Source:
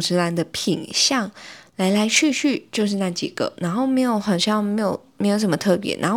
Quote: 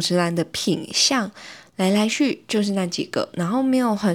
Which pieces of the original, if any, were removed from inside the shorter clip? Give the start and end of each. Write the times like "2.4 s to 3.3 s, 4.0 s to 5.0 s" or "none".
2.1 s to 2.3 s